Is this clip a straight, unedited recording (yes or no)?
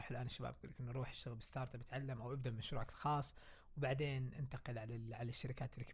yes